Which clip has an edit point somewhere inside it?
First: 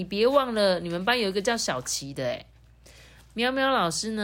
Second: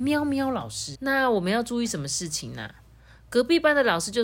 second; 1 cut; at 0.9 s

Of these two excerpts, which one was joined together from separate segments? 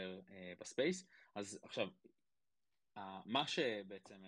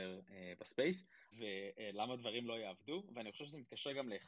second; 1 cut; at 1.3 s

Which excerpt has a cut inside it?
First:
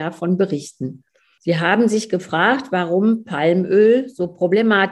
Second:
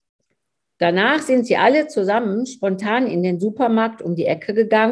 first; 1 cut; at 1.4 s

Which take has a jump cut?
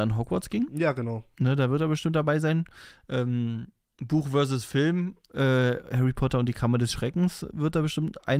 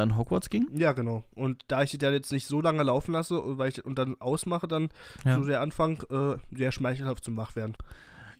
second; 1 cut; at 1.3 s

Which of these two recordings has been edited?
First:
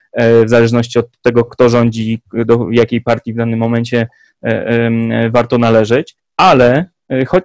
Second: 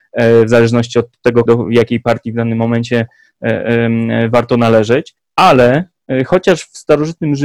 second; 1 cut; at 1.5 s

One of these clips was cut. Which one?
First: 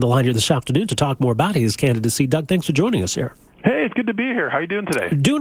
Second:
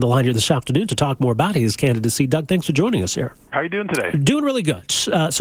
second; 1 cut; at 3.5 s

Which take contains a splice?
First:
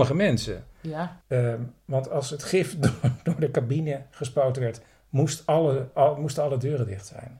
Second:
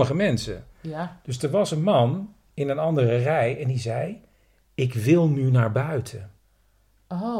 first; 1 cut; at 1.2 s

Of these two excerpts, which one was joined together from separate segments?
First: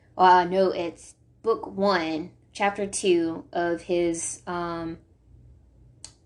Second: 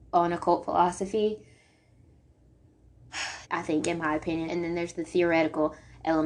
second; 2 cuts; at 3.4 s, 4.5 s

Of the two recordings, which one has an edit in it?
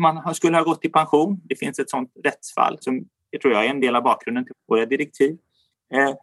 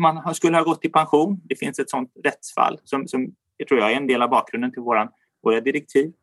first; 2 cuts; at 2.8 s, 4.5 s

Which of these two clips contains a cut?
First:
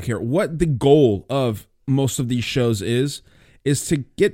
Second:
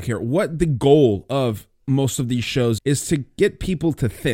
second; 1 cut; at 2.8 s

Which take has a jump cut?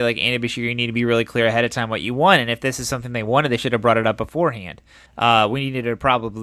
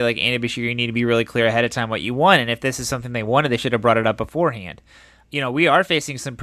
first; 1 cut; at 5.1 s

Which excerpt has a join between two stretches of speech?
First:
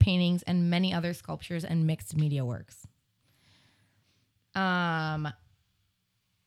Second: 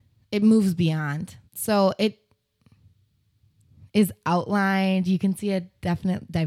second; 1 cut; at 1.5 s

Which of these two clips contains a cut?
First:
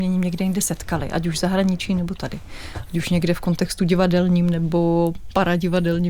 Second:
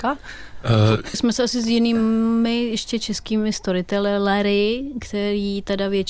second; 1 cut; at 1.1 s

